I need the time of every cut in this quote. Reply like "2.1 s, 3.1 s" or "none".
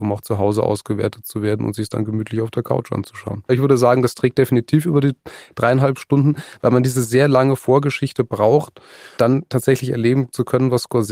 3.5 s, 9.2 s